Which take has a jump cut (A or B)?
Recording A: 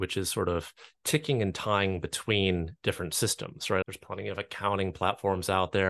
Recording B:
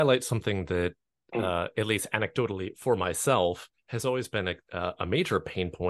A